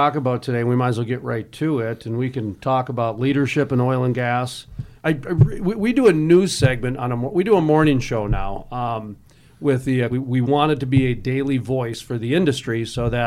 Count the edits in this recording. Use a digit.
2